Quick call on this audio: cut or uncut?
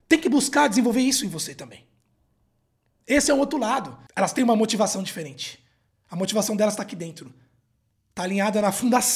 cut